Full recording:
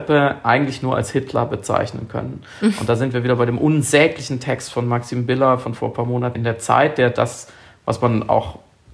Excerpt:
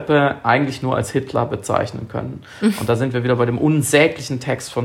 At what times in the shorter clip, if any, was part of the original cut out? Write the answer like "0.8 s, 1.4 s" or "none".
none